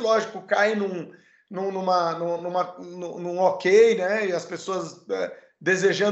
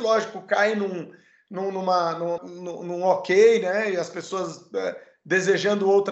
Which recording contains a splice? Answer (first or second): second